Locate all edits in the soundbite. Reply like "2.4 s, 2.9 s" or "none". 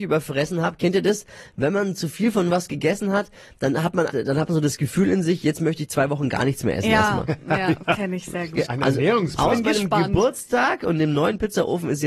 4.1 s, 8.6 s